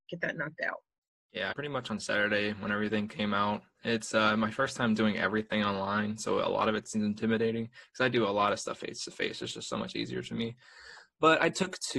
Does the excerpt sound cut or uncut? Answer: cut